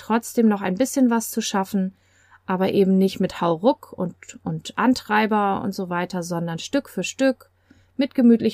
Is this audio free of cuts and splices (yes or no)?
yes